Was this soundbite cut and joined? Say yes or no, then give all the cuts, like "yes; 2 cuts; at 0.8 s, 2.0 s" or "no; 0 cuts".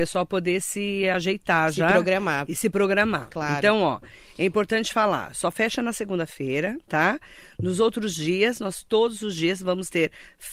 no; 0 cuts